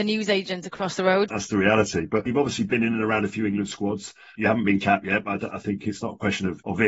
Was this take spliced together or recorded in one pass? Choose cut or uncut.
cut